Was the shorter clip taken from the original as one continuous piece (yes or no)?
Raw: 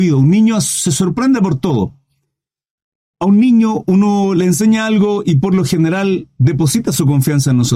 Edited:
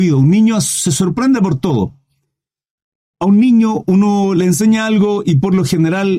yes